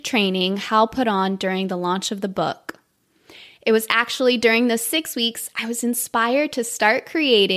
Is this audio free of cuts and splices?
yes; 0 cuts

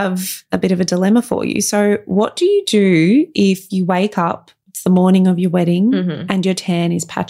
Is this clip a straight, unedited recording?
yes; 0 cuts

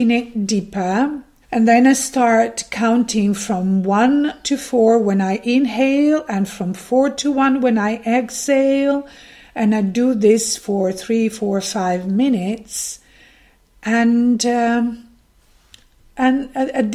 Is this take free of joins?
no; 1 cut; at 1.4 s

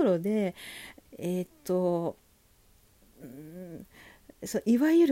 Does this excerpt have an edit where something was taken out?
yes; 1 cut; at 1.1 s

